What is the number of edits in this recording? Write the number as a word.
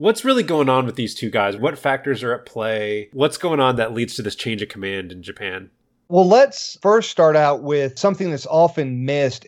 one